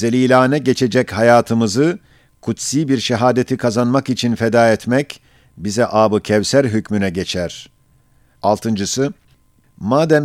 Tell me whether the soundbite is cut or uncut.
cut